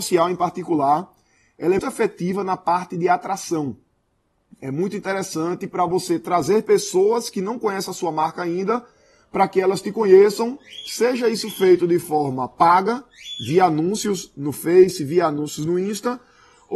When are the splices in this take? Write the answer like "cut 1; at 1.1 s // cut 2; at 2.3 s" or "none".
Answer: cut 1; at 1.8 s